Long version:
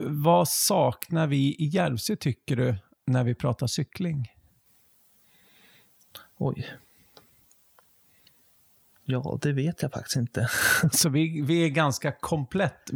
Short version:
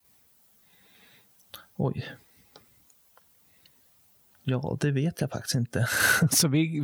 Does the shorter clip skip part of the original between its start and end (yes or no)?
no